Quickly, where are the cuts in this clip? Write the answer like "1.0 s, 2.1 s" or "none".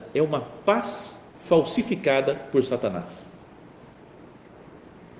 1.4 s

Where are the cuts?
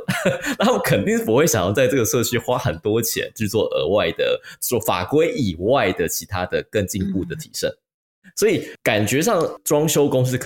none

